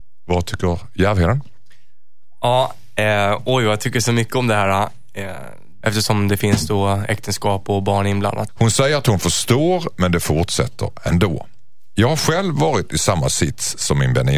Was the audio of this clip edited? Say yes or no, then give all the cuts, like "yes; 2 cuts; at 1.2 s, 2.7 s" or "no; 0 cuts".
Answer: yes; 2 cuts; at 5.8 s, 8.5 s